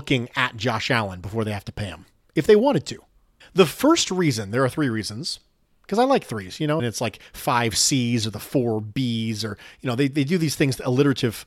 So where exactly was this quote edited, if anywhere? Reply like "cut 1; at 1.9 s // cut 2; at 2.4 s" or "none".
cut 1; at 3.4 s // cut 2; at 6.8 s